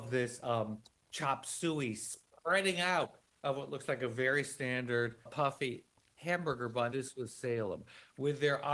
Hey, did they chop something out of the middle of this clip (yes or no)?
yes